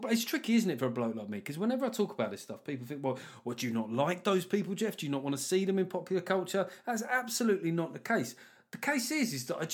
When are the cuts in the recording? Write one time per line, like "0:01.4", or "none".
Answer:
none